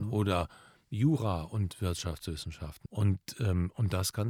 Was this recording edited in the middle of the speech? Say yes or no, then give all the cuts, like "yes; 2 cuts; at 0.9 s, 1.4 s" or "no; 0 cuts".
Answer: yes; 1 cut; at 2.9 s